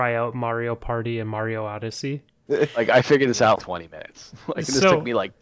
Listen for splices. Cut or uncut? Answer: cut